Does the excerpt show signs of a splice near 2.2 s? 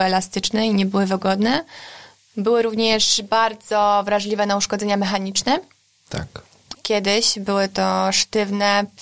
no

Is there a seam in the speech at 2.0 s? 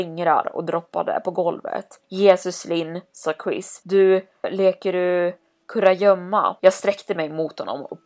no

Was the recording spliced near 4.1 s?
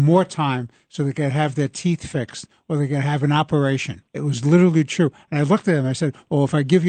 yes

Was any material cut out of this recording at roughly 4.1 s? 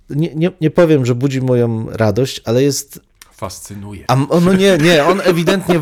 yes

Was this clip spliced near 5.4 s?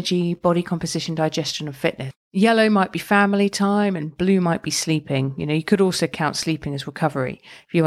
no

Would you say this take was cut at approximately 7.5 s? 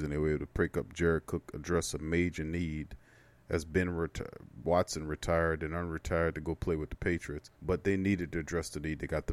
yes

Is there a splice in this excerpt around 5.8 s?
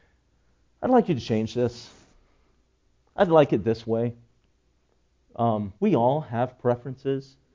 yes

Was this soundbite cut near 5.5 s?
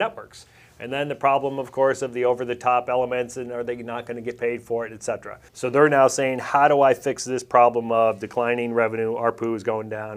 yes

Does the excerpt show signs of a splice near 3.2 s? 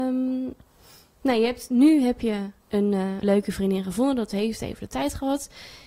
yes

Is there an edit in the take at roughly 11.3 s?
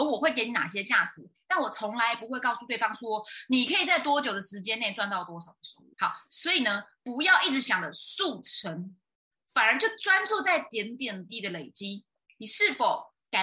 yes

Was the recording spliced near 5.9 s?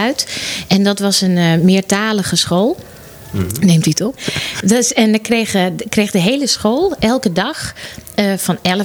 no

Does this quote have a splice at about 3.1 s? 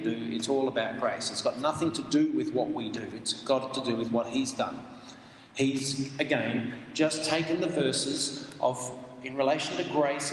no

